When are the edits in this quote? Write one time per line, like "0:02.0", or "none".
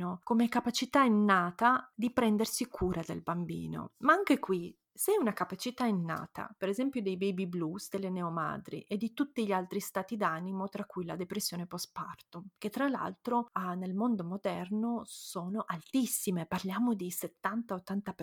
0:06.6